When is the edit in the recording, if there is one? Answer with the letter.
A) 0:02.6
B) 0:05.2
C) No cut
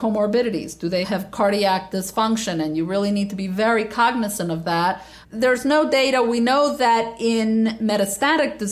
B